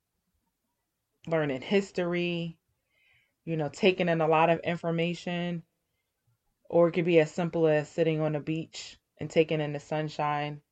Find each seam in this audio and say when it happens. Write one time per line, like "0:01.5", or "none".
none